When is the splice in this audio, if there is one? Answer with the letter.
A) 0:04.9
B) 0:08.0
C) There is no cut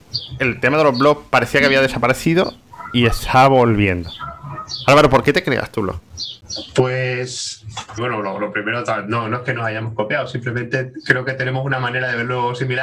B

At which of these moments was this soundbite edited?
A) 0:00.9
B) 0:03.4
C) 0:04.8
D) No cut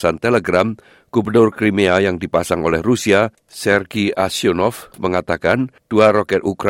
D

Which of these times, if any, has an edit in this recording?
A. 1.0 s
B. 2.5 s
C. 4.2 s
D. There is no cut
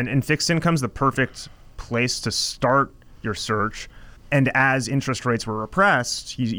C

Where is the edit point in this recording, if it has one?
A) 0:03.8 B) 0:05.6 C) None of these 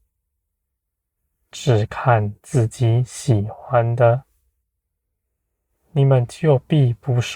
C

